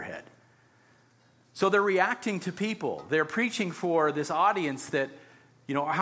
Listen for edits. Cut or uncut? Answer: uncut